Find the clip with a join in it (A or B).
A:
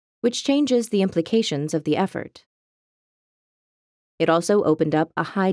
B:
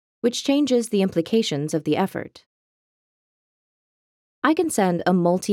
A